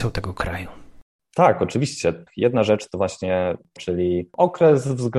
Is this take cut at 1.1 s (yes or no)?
no